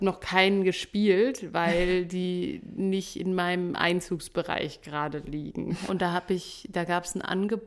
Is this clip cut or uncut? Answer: cut